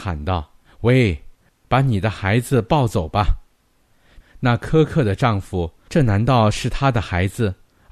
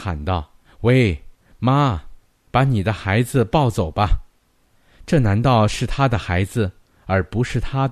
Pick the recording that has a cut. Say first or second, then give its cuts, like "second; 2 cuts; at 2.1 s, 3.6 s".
first; 3 cuts; at 1.5 s, 4.2 s, 5.9 s